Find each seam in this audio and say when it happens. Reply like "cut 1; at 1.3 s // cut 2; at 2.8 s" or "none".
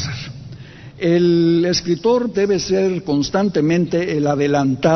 cut 1; at 2.3 s